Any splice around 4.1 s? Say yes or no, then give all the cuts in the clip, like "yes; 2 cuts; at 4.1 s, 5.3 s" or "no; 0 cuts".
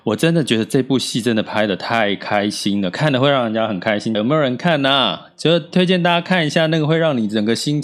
yes; 1 cut; at 4.1 s